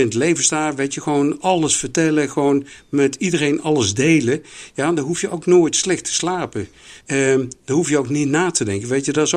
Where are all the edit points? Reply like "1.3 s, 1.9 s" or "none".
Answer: 7.0 s

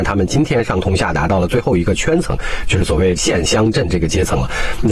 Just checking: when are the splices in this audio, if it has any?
none

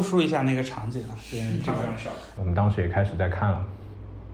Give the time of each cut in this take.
2.4 s

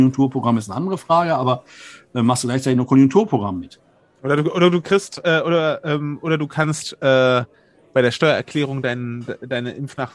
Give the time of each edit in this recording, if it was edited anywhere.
none

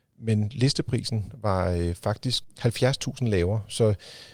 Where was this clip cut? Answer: 2.4 s

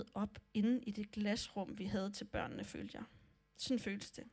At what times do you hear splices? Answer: none

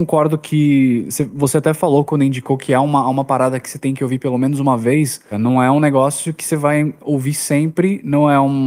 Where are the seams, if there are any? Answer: 5.3 s

